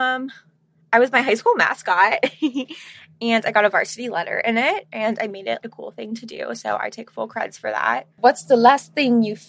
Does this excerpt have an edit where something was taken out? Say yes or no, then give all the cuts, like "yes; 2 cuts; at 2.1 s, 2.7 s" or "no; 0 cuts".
yes; 1 cut; at 5.6 s